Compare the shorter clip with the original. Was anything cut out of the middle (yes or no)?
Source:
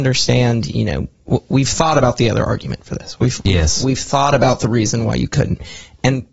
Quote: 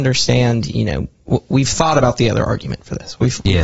no